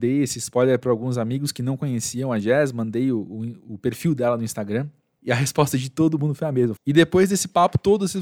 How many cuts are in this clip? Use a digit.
1